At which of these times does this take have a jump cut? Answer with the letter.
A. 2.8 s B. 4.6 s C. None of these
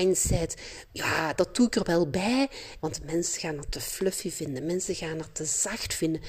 A